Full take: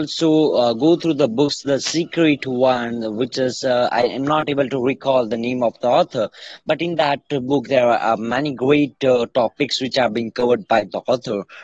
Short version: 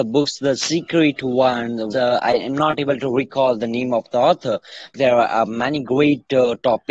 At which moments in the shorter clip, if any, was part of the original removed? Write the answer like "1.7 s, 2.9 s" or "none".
1.9 s, 4.9 s